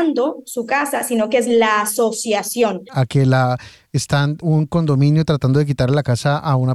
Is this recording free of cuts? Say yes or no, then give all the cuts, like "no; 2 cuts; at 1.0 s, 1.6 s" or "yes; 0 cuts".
no; 2 cuts; at 2.9 s, 4.4 s